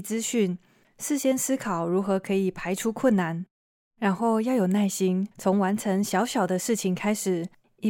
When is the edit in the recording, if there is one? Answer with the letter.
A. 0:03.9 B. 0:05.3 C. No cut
B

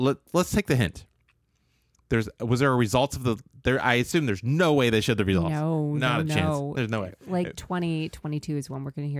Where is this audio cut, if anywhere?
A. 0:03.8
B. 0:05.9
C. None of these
C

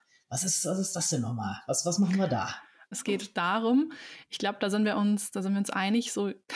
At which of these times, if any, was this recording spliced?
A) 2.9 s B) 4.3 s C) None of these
A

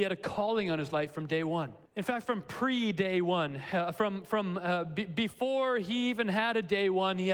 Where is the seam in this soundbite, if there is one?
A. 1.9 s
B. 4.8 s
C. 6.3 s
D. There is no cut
A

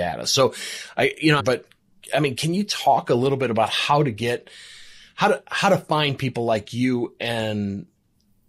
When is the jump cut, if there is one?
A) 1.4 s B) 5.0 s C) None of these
A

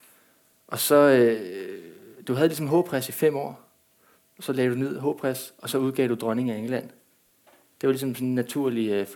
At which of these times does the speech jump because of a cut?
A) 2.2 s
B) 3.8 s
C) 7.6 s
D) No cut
D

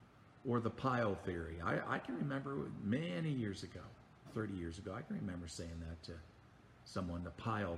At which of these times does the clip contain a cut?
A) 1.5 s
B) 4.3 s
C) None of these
B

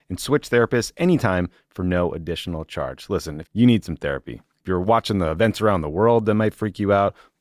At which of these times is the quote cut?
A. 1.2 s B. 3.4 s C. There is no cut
B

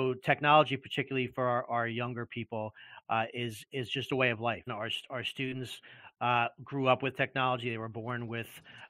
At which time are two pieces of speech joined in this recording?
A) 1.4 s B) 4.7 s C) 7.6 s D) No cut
B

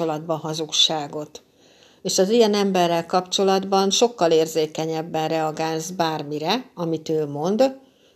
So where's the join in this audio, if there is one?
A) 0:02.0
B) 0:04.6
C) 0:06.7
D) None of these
D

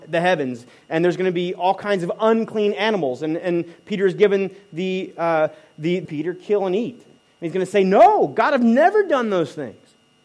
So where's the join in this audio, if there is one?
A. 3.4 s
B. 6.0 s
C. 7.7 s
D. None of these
B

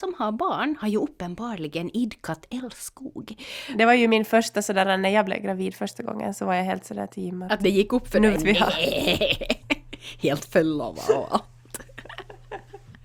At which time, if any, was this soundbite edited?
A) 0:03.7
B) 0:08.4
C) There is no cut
B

